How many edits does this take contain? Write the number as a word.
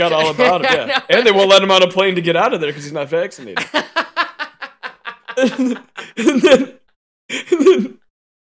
zero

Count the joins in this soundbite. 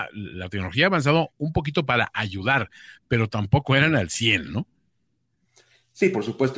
zero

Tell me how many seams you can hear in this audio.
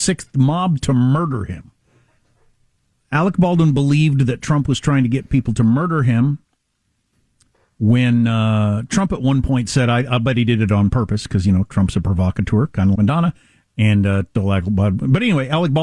two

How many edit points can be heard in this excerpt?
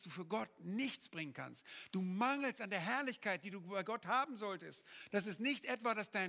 one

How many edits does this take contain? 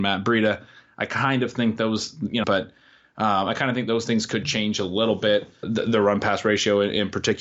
two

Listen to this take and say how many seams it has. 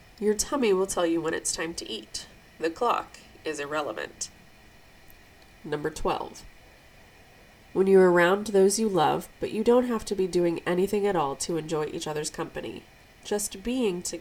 one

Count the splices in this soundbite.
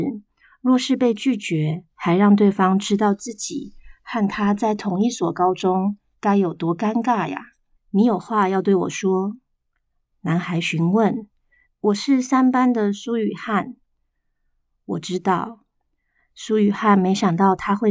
two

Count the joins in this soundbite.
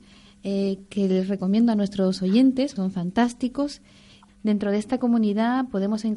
two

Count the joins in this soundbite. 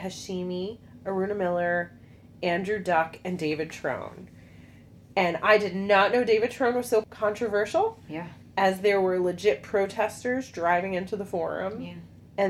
zero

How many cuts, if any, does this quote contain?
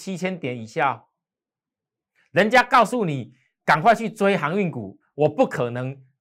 two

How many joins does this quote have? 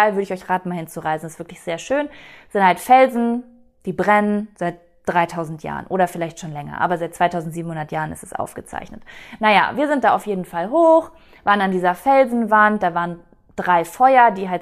zero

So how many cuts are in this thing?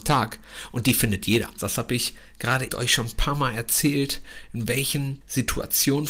two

